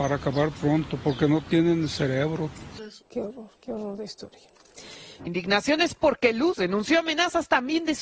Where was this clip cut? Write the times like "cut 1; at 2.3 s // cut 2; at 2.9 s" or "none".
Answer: cut 1; at 3.0 s // cut 2; at 5.2 s